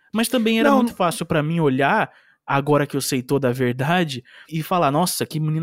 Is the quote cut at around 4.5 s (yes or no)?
yes